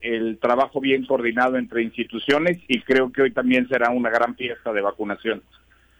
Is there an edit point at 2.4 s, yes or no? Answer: no